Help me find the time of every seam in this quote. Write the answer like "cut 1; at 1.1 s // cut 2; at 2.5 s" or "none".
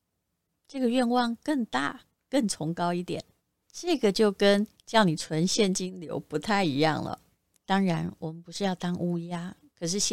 cut 1; at 3.6 s // cut 2; at 7.6 s